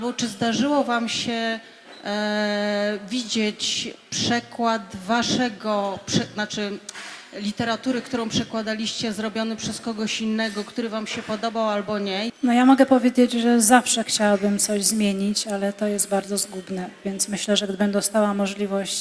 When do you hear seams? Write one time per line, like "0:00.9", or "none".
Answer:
0:12.3